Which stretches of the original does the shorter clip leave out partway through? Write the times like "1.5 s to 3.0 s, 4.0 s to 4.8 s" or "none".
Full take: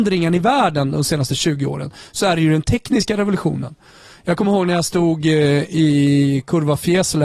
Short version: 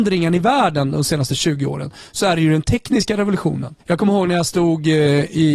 3.8 s to 4.2 s